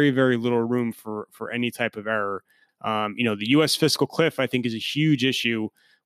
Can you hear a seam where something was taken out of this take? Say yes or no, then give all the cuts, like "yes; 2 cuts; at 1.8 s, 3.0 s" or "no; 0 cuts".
yes; 1 cut; at 2.7 s